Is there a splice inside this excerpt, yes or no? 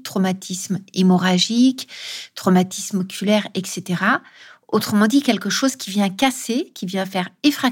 no